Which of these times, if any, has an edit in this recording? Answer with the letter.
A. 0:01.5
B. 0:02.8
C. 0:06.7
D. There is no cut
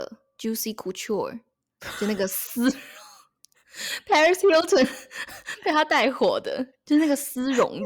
D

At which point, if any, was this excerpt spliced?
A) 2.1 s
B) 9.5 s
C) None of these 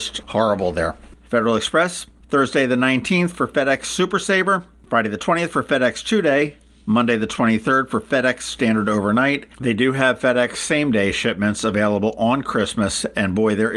B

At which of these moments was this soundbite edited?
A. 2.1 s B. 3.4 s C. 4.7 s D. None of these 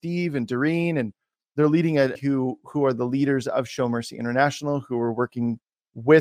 A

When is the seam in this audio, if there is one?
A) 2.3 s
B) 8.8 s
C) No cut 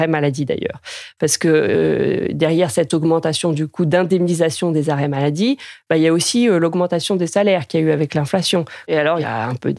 B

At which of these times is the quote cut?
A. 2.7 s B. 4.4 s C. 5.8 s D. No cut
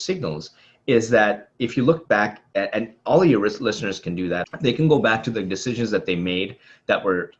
B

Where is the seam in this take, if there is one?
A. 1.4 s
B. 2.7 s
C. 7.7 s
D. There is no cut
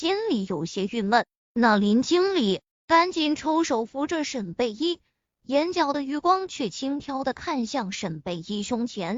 A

